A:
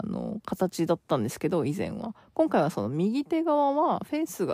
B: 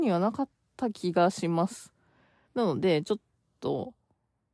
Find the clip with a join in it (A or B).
B